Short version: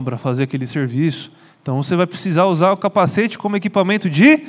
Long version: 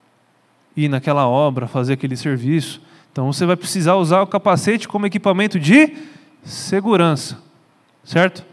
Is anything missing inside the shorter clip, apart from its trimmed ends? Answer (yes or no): no